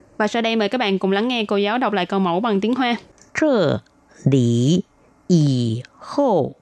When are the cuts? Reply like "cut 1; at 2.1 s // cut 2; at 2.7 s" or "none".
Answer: cut 1; at 3.3 s